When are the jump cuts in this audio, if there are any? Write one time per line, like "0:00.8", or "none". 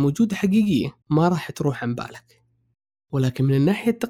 0:01.0